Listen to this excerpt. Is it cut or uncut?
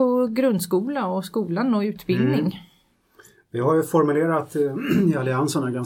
uncut